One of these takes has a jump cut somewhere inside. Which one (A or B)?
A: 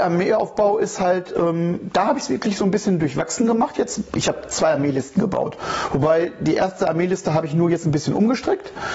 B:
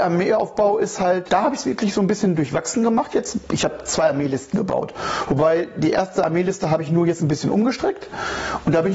B